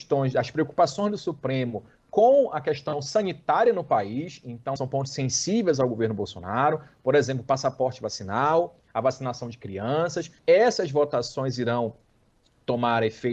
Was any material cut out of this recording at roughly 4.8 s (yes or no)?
yes